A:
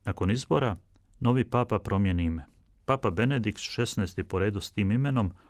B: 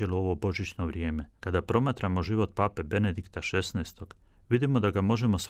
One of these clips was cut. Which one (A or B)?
B